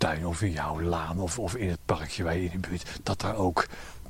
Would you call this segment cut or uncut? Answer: uncut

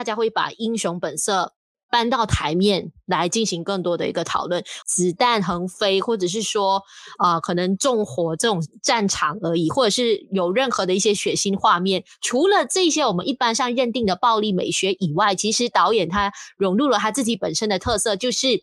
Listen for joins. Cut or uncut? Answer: cut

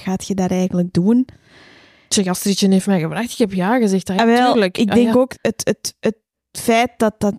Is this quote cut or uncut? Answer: uncut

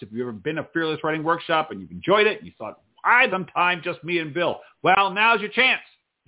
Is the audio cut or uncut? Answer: cut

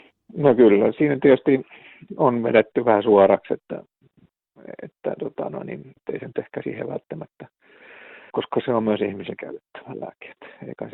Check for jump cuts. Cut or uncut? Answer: cut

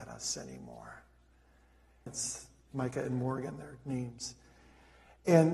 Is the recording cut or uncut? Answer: cut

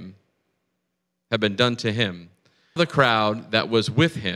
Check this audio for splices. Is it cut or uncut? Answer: cut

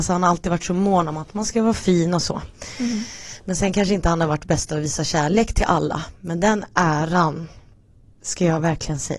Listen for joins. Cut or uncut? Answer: uncut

